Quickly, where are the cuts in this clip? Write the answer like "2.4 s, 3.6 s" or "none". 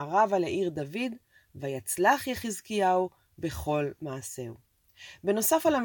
none

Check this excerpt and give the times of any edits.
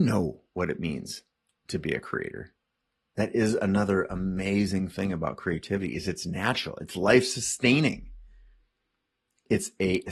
none

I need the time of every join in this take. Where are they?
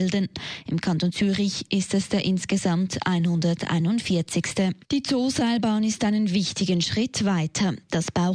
4.8 s

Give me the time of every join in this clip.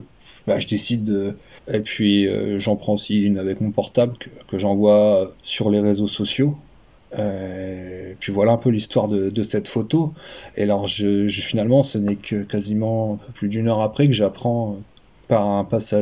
1.6 s, 5.4 s

